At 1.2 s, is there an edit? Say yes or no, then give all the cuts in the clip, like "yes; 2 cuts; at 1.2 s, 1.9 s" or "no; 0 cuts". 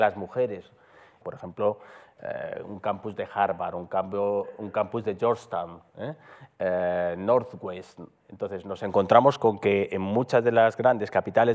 yes; 1 cut; at 1.2 s